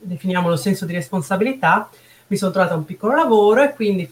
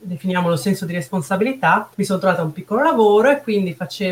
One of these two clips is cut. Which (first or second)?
second